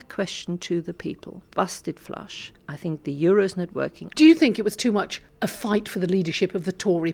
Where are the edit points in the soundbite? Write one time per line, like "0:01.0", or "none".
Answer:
0:01.5
0:04.1